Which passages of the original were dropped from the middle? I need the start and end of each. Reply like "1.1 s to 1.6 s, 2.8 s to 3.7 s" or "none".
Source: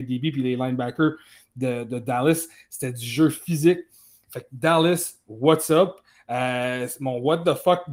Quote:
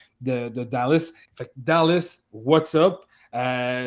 2.6 s to 4.2 s